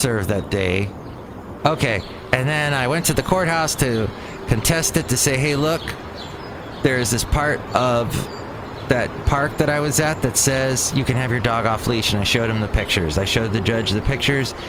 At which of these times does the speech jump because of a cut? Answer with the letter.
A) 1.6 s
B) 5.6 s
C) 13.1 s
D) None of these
A